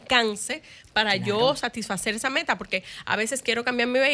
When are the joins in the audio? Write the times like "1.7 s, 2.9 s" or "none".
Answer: none